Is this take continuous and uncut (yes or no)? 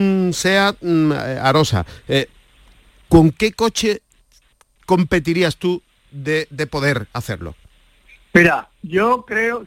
yes